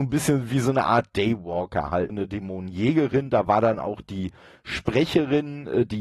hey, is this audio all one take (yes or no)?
no